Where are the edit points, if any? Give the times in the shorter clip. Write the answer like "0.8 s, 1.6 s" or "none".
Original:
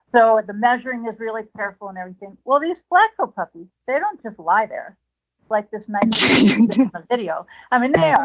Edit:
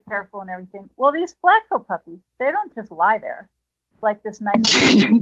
none